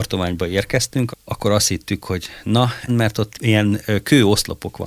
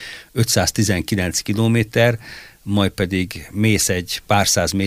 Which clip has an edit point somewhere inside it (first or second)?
first